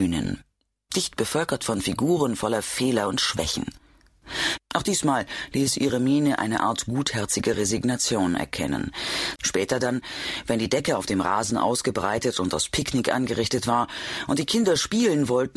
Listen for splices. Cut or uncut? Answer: cut